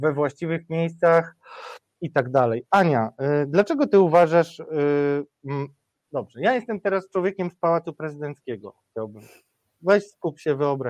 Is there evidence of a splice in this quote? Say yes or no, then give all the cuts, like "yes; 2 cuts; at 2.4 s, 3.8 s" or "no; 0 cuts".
no; 0 cuts